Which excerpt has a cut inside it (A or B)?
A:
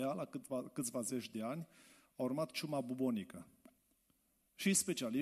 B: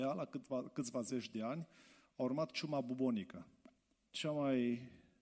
B